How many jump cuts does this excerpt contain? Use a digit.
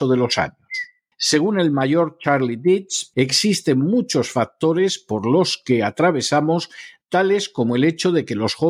2